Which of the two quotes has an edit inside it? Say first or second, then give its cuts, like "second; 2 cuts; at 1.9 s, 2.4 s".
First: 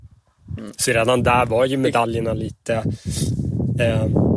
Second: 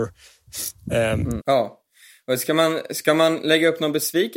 second; 1 cut; at 1.4 s